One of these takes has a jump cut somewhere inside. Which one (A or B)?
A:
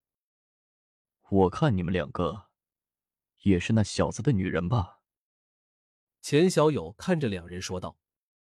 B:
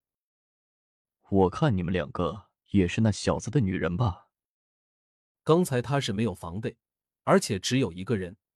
B